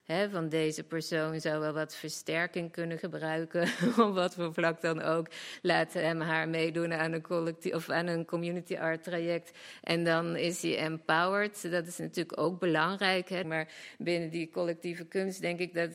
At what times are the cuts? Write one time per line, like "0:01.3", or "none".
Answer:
0:13.4